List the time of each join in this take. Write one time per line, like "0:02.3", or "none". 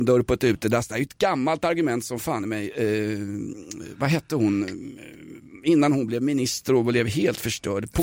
none